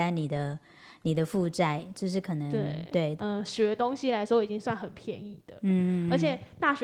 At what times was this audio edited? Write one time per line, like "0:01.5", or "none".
0:03.2